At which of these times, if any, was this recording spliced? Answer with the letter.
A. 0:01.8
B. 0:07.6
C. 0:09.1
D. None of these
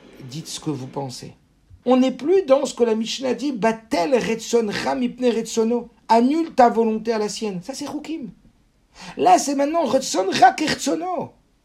A